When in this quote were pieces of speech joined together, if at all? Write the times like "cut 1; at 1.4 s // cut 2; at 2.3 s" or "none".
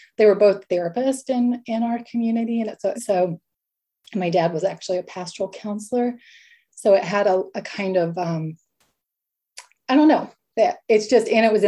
cut 1; at 3.0 s